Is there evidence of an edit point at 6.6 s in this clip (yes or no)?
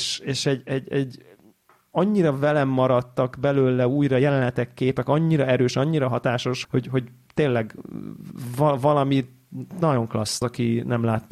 yes